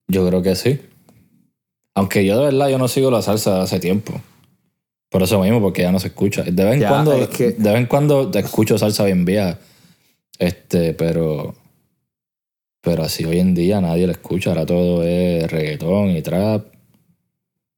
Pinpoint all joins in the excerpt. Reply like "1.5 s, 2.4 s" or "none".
none